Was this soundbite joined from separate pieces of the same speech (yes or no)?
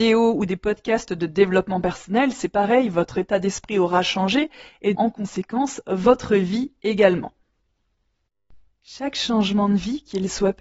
yes